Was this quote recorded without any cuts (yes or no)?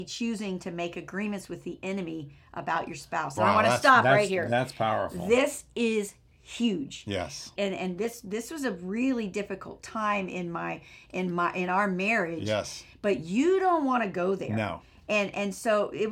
no